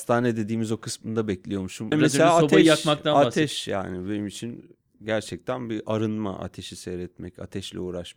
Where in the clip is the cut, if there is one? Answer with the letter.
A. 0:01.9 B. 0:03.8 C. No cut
A